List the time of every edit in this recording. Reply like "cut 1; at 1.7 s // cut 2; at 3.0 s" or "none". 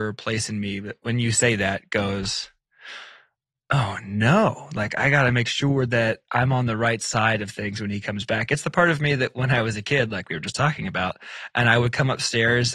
none